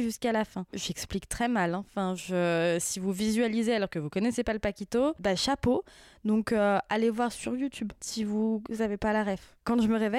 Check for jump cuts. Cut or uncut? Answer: uncut